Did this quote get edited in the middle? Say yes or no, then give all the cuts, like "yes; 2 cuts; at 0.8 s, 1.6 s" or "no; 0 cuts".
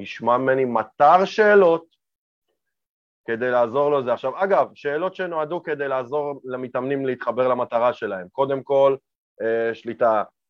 no; 0 cuts